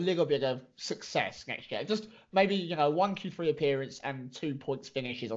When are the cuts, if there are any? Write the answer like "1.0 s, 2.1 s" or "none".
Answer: none